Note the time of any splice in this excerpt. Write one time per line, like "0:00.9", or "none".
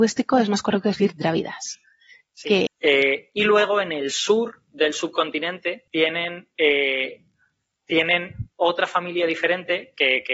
0:02.7
0:05.9